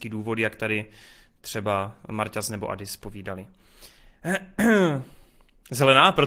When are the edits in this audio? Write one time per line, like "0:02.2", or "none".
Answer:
none